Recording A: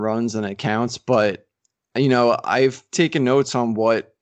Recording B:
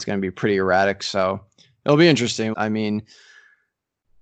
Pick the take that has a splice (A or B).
B